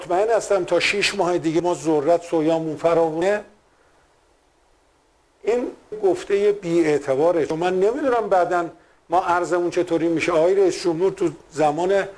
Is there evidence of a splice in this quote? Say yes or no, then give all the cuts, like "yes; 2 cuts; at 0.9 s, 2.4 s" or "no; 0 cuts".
yes; 1 cut; at 5.9 s